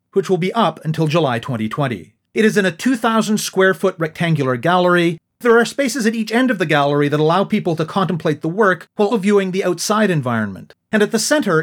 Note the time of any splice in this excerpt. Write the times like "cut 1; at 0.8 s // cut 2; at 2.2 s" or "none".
cut 1; at 5.3 s // cut 2; at 9.1 s